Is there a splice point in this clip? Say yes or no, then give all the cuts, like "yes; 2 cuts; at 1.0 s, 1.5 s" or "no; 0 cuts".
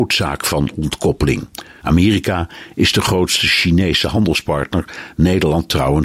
yes; 1 cut; at 1.8 s